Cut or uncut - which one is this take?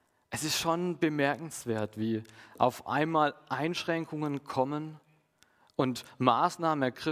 uncut